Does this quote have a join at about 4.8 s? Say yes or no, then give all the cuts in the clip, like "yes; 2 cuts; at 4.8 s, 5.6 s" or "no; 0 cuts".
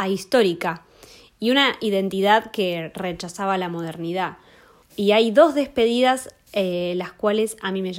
yes; 1 cut; at 4.8 s